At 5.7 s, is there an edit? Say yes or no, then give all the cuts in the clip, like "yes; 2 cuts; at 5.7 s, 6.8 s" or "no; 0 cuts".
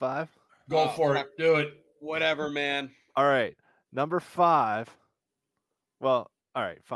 no; 0 cuts